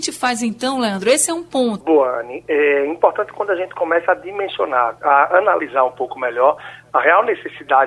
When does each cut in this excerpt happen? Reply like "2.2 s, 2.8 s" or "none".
1.8 s

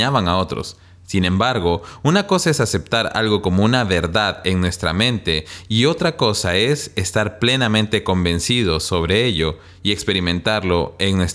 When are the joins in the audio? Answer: none

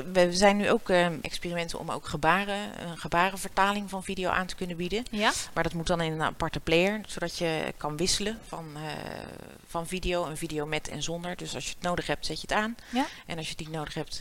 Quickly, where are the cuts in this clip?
1.2 s

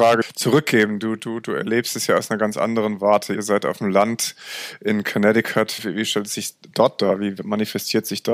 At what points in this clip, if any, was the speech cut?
none

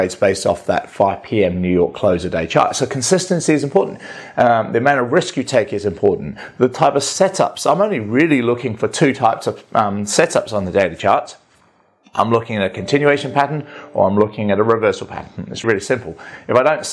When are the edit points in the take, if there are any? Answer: 15.6 s

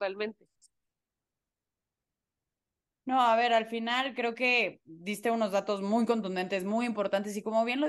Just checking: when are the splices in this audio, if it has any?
none

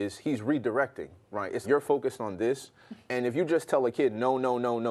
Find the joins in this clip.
1.6 s

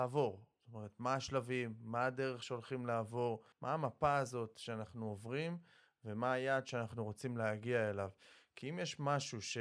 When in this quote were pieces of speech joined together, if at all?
3.5 s

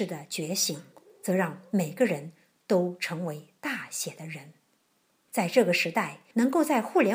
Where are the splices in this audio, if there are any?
none

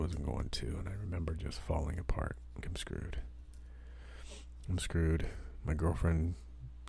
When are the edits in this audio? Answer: 2.6 s

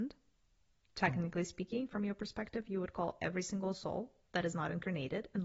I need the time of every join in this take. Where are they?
none

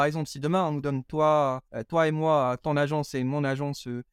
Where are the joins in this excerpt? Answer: 1.7 s

